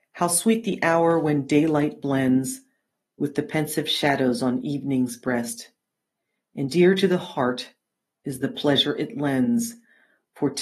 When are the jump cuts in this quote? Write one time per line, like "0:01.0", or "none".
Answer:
none

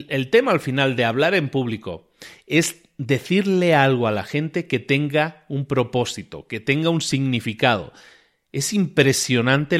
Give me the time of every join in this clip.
none

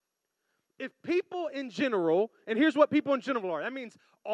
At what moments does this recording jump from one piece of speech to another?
none

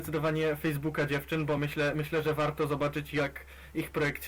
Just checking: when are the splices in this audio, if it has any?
none

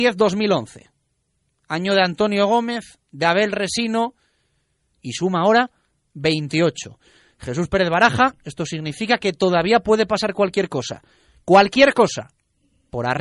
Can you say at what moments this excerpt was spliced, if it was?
0:04.9

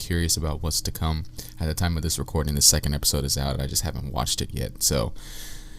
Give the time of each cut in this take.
none

